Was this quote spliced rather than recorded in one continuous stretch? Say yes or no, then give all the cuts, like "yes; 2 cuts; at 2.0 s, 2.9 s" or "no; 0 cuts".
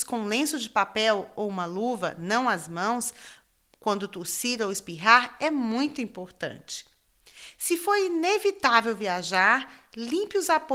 no; 0 cuts